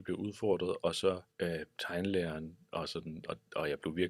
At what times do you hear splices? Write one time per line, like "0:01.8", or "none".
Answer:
0:01.3